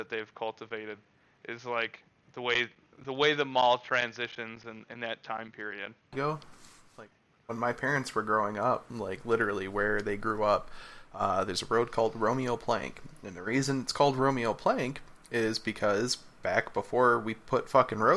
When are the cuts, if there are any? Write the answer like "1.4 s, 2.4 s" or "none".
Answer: 6.1 s